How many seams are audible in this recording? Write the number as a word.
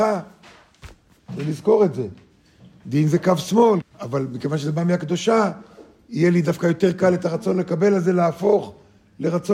two